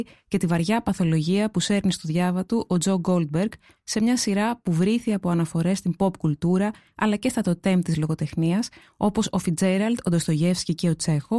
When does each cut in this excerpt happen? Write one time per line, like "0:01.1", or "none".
0:03.7